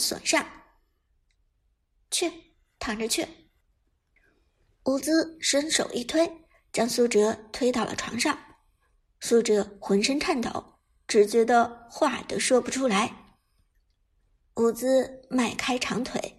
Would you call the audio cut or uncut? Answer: uncut